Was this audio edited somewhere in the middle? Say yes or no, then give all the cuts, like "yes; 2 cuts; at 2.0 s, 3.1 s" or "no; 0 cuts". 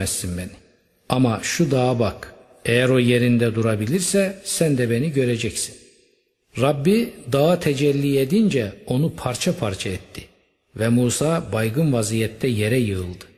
no; 0 cuts